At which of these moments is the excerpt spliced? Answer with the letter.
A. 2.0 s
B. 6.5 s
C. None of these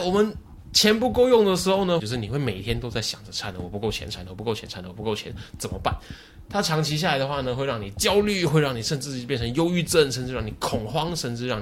A